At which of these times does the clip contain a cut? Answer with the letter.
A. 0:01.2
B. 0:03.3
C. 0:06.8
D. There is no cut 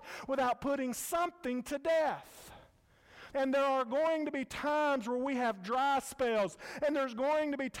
B